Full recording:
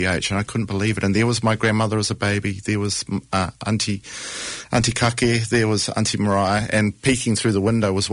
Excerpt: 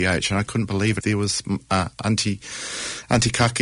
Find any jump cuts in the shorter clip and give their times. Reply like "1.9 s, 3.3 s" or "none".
1.0 s